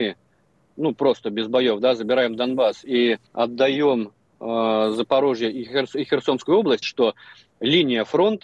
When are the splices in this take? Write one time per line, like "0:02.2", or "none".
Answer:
0:03.3
0:06.8